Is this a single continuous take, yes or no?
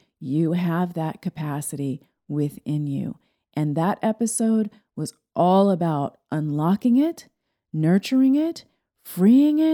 yes